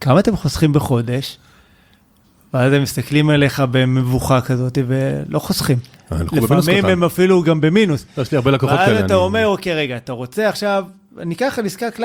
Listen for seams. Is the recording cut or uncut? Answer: uncut